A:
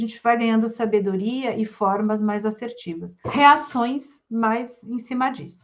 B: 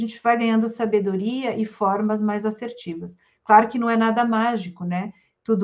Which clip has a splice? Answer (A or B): A